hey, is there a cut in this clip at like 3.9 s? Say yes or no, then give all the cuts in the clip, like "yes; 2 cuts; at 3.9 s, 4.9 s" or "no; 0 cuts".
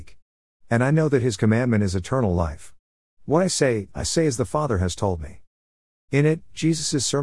yes; 2 cuts; at 3.9 s, 6.1 s